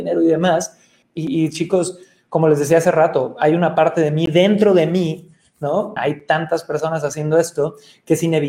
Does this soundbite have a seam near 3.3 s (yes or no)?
no